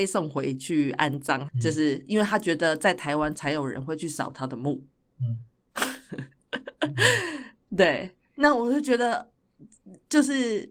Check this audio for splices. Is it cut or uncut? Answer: cut